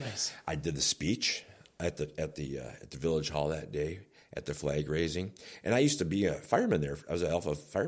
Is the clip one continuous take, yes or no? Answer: yes